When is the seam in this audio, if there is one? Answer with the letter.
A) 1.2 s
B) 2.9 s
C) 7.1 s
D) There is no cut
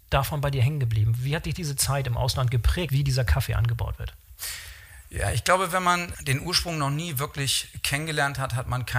B